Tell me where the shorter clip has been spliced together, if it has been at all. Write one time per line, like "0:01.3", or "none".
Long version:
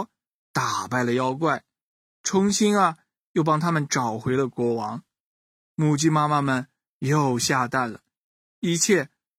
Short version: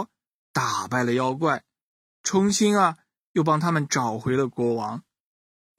none